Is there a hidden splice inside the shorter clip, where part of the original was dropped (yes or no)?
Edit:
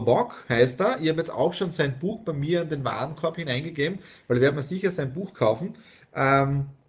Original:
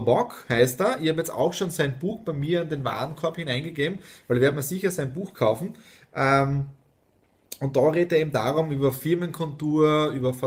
no